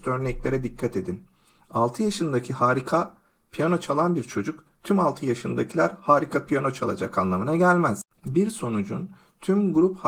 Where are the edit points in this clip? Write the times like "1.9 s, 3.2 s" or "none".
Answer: none